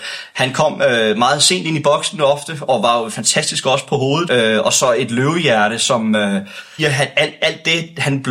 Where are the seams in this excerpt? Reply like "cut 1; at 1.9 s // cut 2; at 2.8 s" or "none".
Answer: cut 1; at 4.3 s // cut 2; at 6.8 s